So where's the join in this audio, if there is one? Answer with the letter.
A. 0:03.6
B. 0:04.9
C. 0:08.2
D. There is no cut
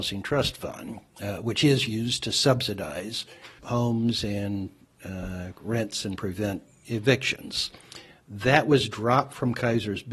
A